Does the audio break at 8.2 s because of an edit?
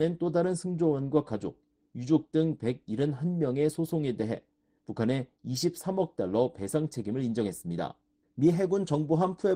yes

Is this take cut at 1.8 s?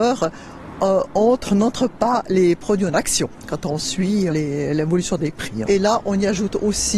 no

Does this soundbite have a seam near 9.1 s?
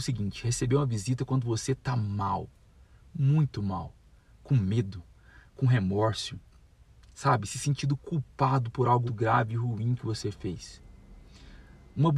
yes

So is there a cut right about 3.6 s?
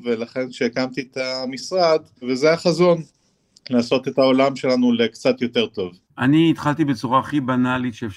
no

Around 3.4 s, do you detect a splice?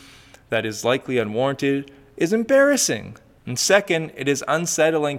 yes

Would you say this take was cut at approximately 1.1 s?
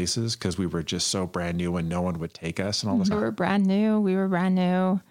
no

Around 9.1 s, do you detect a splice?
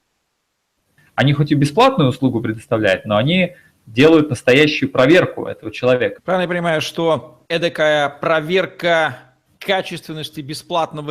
no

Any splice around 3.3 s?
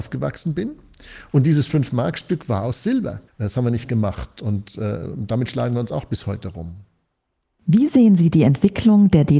yes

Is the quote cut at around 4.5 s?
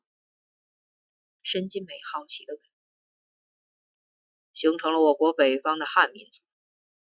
no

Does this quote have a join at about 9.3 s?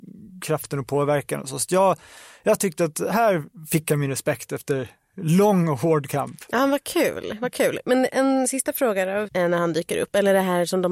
yes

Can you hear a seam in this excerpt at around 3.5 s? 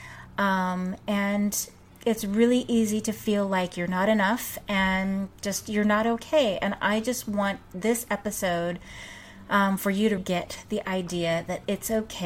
no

